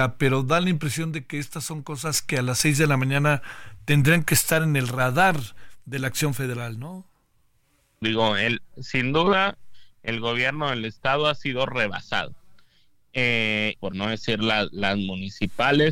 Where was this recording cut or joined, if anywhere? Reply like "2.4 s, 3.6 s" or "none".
8.0 s, 13.8 s